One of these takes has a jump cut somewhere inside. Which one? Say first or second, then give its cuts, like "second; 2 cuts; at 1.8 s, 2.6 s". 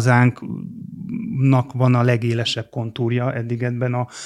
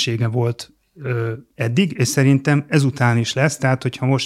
second; 1 cut; at 1.5 s